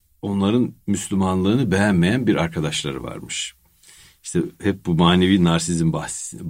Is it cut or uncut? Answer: uncut